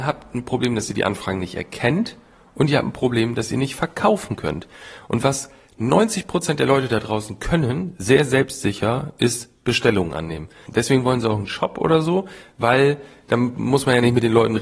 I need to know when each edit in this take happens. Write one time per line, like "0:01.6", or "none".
0:10.7